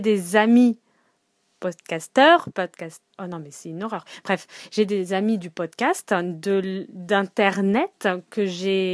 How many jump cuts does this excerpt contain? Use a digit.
1